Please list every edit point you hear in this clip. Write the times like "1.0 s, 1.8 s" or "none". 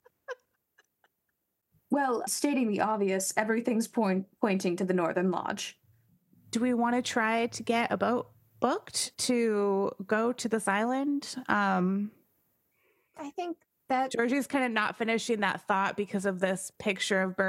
2.3 s